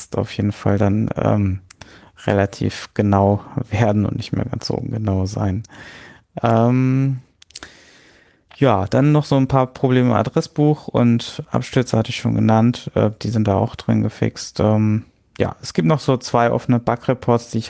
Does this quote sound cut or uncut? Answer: uncut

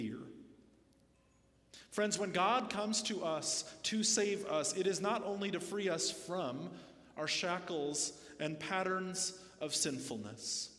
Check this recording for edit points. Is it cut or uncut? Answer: uncut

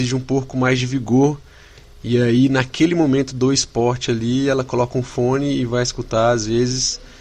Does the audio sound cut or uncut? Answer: uncut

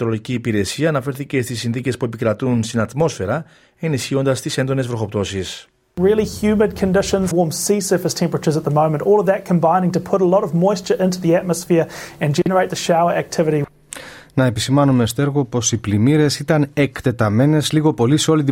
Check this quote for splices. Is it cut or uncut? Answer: cut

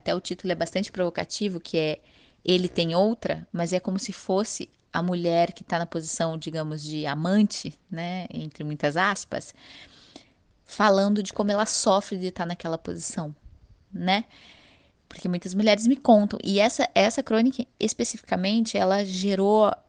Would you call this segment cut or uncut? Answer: uncut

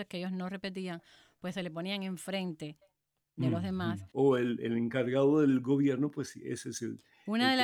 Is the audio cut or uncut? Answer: cut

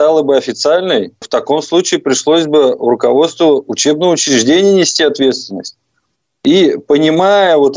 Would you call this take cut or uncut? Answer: uncut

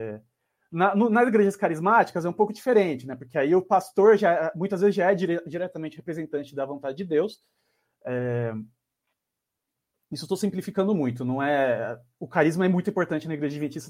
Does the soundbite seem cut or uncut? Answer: uncut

